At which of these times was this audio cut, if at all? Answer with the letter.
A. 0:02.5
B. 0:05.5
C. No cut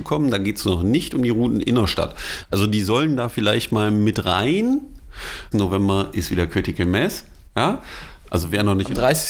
B